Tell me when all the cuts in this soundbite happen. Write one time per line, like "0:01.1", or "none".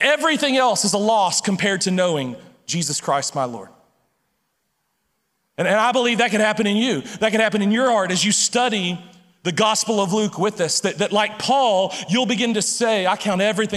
none